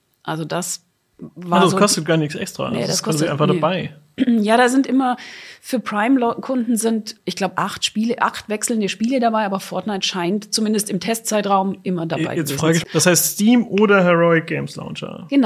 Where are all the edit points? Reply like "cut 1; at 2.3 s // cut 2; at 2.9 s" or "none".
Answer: cut 1; at 7.2 s // cut 2; at 12.8 s